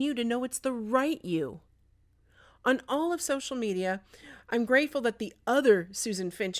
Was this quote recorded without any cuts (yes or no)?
yes